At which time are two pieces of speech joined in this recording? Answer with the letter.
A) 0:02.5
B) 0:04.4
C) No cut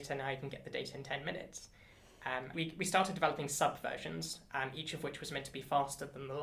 A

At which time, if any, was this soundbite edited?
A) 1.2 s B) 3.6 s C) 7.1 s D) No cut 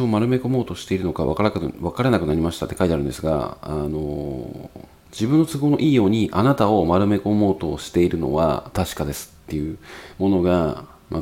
D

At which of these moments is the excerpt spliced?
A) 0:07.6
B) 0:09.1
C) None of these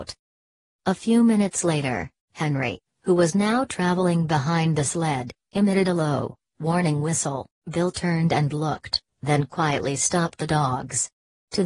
A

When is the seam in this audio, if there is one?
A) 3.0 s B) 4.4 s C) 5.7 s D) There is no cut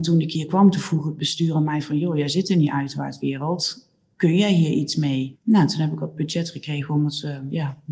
D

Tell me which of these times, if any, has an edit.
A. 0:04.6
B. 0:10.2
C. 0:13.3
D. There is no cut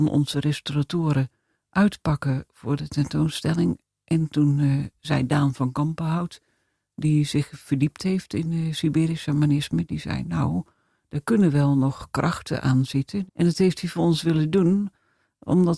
C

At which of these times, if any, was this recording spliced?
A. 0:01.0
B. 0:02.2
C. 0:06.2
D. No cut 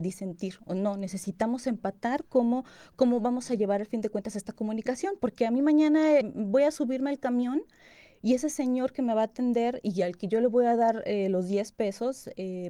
C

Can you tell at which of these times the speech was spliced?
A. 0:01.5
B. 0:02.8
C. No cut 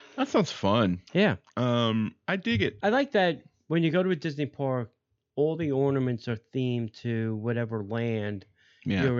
B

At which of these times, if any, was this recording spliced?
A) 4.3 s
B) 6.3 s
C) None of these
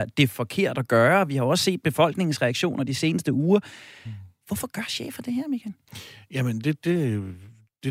C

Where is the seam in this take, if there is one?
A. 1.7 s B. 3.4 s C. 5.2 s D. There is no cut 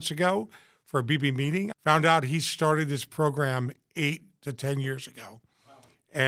A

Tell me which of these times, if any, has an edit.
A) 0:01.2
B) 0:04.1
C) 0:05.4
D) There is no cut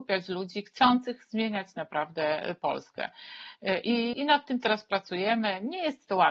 B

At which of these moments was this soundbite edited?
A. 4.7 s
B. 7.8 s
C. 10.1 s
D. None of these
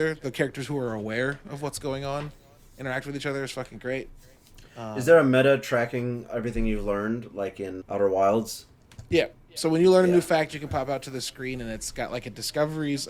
B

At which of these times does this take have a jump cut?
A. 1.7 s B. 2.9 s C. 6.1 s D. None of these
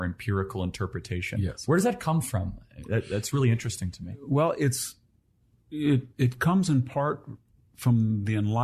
C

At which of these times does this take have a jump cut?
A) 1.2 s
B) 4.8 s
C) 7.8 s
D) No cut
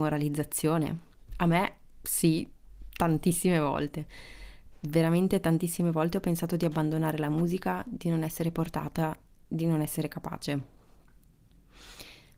D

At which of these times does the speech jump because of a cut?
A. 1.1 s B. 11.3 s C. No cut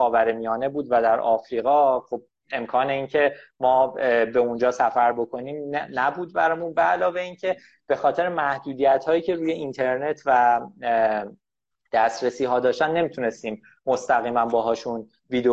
C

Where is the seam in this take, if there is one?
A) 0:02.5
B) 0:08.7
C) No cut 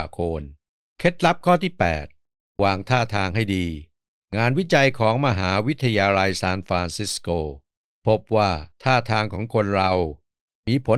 B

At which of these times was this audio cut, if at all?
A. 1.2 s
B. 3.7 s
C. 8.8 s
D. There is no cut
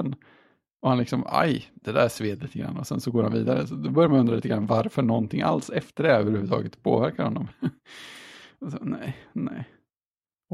D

